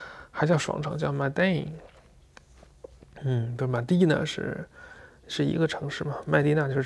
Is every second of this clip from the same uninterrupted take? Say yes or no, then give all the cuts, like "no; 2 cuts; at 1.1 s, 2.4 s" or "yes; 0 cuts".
yes; 0 cuts